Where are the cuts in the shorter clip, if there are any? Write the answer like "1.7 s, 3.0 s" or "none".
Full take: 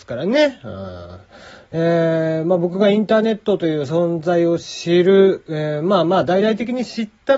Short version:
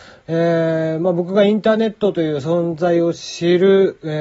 none

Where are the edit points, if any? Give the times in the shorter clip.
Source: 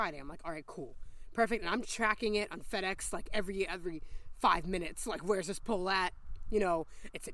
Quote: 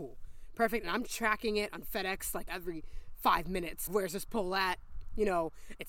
2.5 s, 3.9 s

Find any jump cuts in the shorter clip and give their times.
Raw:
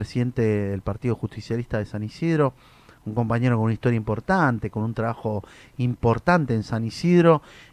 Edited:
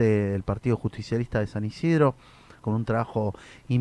2.6 s

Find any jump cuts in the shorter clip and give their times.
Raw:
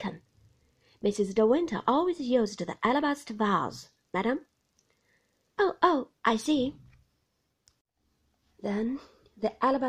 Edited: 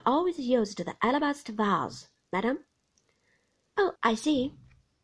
4.0 s

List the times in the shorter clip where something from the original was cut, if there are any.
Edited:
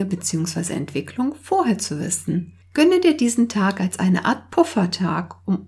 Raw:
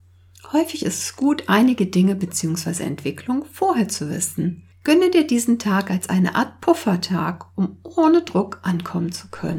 none

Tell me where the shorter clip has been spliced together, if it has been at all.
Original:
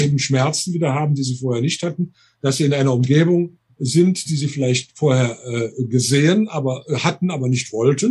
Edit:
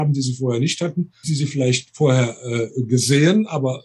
1.2 s

